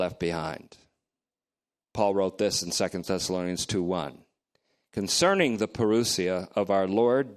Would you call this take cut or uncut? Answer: uncut